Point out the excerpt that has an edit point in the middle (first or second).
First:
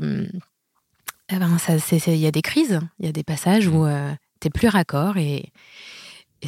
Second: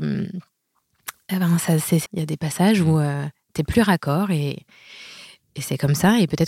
second